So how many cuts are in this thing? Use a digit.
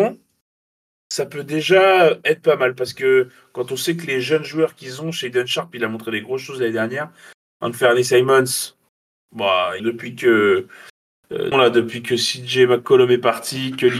2